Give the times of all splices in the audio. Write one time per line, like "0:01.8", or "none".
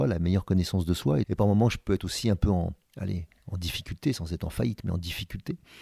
0:01.2
0:02.8